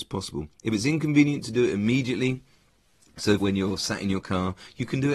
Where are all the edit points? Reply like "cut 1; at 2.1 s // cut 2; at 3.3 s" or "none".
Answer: cut 1; at 3.4 s